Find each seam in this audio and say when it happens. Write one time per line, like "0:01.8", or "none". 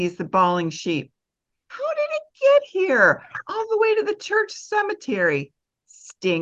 0:01.5